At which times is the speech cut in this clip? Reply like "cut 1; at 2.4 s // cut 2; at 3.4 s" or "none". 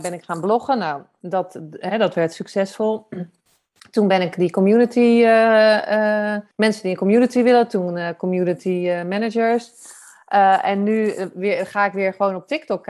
cut 1; at 6.5 s